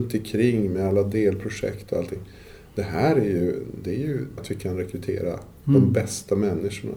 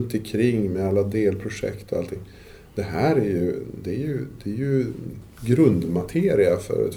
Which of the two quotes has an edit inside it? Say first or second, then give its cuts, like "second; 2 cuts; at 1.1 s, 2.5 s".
first; 1 cut; at 4.4 s